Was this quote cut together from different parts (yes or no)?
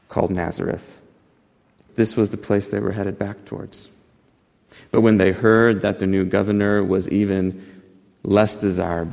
yes